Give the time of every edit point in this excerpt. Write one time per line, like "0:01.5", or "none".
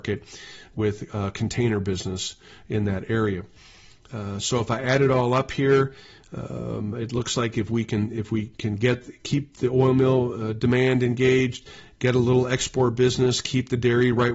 none